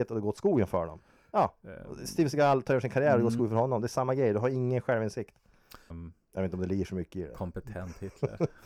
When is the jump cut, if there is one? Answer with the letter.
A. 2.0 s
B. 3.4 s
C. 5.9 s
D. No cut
C